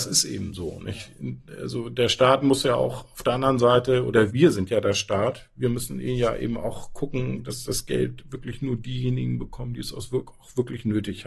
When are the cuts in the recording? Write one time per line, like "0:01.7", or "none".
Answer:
0:04.3